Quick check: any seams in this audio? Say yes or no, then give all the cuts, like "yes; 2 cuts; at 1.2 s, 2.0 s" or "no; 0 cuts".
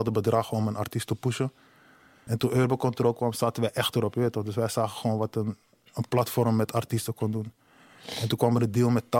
yes; 1 cut; at 2.3 s